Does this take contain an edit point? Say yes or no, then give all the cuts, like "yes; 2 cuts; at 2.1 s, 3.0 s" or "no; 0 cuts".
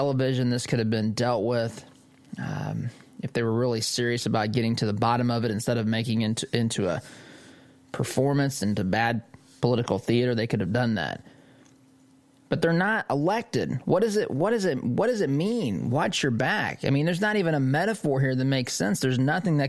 no; 0 cuts